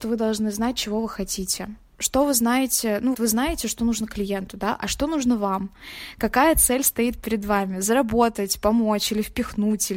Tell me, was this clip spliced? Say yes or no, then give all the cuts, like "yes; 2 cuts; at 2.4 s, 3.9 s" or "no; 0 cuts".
yes; 1 cut; at 3.1 s